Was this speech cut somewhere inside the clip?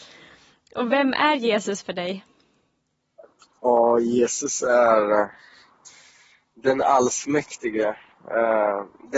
no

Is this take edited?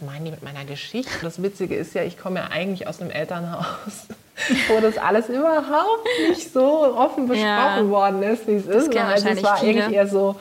yes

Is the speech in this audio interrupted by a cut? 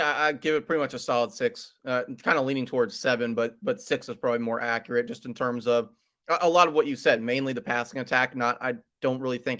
no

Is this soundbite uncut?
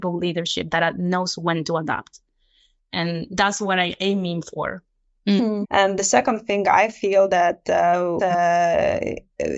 no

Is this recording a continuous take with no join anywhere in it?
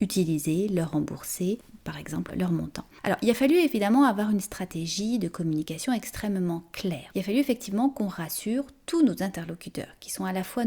no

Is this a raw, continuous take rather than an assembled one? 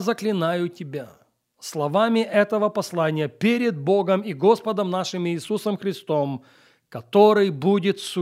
yes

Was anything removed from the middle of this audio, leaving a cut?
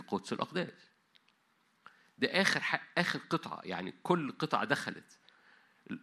no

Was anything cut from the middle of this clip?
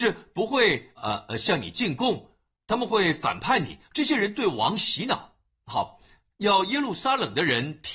yes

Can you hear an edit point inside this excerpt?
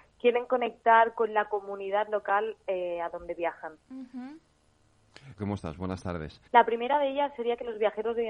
yes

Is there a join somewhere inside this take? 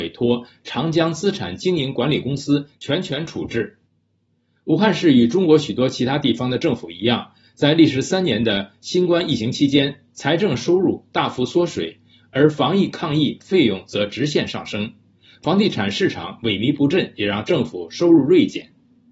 no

